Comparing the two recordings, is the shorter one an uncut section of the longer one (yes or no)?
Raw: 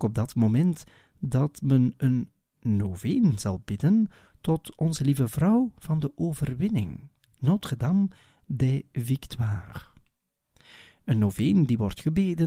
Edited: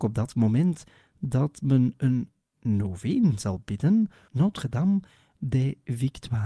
no